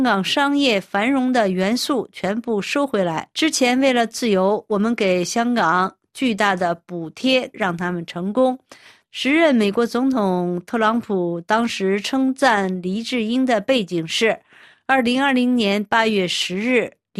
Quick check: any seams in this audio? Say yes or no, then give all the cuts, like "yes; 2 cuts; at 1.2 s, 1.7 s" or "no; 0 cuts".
yes; 3 cuts; at 3.3 s, 7.5 s, 9.0 s